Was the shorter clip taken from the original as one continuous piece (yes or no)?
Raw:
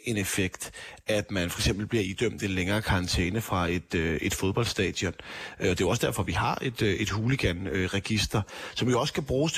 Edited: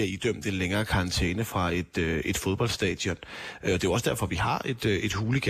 yes